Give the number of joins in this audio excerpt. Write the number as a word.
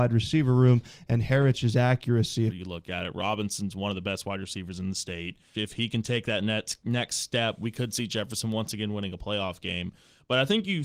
two